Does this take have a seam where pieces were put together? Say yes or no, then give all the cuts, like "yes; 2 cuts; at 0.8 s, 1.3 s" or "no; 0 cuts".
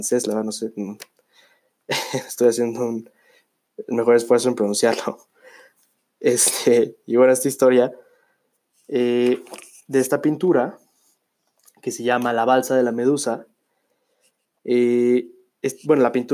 no; 0 cuts